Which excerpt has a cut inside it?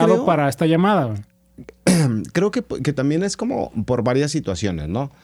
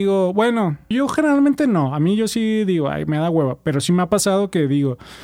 second; 1 cut; at 0.9 s

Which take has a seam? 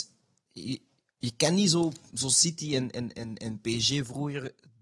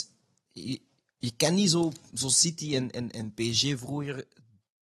second; 1 cut; at 3.1 s

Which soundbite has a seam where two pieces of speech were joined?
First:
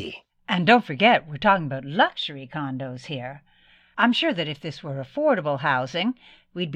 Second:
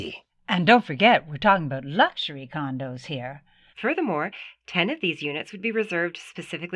second; 1 cut; at 3.7 s

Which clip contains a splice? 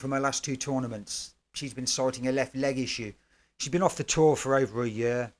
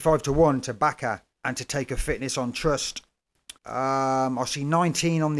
second; 2 cuts; at 1.3 s, 3.6 s

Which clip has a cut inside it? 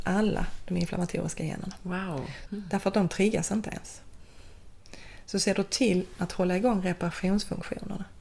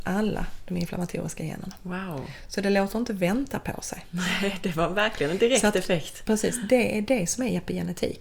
first; 1 cut; at 2.5 s

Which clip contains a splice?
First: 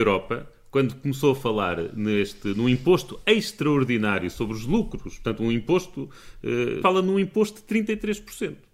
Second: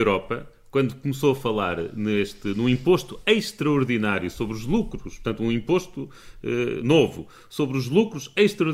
first; 1 cut; at 6.8 s

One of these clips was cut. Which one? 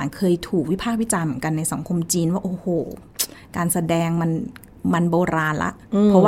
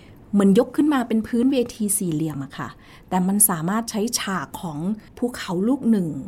second; 1 cut; at 5.1 s

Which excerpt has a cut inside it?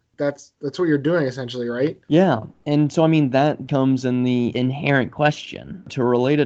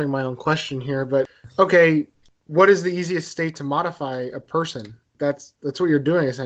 first; 1 cut; at 2.0 s

